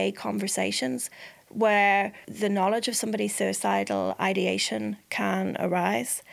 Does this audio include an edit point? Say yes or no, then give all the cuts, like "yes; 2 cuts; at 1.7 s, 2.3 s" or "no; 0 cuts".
yes; 1 cut; at 2.2 s